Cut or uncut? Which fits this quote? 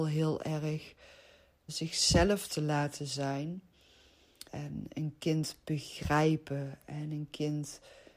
cut